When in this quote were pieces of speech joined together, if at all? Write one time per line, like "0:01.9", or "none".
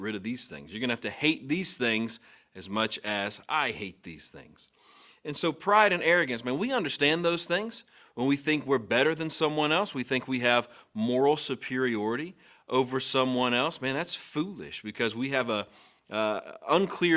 none